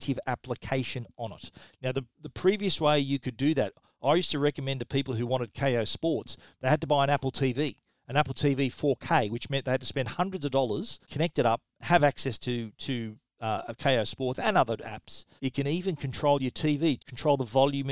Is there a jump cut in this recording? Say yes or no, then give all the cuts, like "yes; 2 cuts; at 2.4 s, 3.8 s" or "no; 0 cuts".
yes; 3 cuts; at 11.0 s, 15.4 s, 17.0 s